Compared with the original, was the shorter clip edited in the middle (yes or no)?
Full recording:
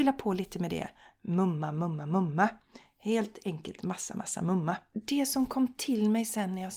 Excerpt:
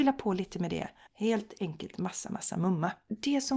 yes